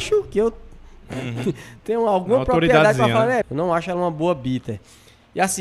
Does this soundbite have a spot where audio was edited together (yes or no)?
yes